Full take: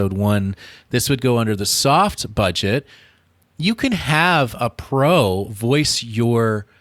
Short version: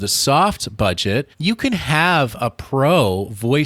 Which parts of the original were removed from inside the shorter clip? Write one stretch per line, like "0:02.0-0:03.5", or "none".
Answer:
0:02.9-0:03.5